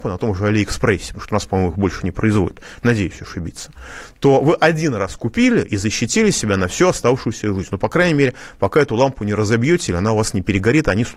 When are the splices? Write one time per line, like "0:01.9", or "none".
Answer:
none